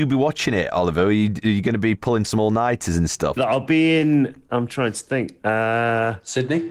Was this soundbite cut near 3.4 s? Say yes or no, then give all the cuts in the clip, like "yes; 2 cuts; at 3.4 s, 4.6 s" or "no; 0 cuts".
yes; 1 cut; at 3.4 s